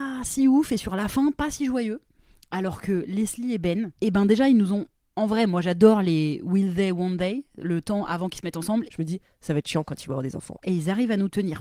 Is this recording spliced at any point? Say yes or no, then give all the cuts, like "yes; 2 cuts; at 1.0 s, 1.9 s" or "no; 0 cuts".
yes; 2 cuts; at 8.9 s, 10.6 s